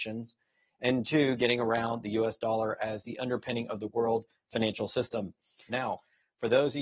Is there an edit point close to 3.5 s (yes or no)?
no